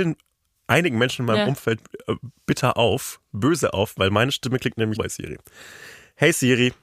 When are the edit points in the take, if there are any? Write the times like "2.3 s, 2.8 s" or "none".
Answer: 5.0 s